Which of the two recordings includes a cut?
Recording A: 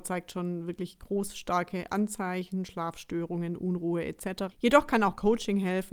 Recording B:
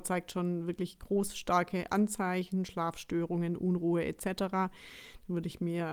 A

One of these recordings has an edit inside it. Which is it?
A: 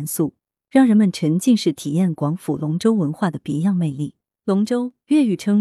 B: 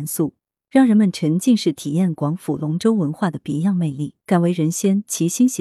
B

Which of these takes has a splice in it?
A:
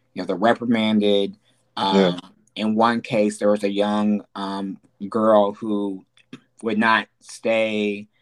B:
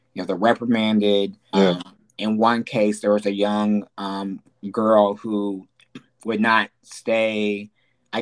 B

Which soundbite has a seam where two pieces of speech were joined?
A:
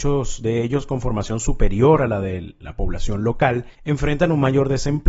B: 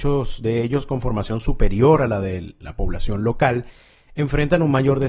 A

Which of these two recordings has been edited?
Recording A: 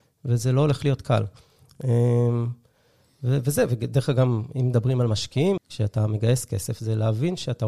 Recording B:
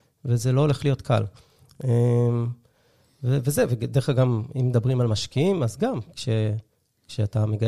A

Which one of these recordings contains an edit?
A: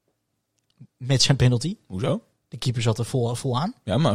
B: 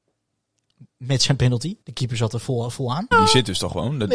B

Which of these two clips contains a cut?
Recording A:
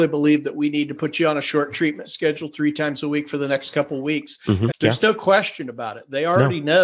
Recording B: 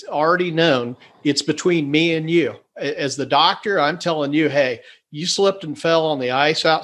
A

